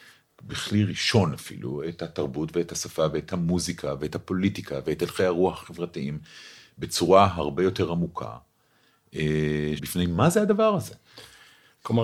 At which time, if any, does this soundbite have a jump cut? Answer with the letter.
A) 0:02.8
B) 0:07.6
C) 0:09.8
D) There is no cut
C